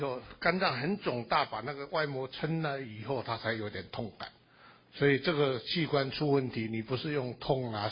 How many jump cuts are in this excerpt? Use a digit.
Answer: 0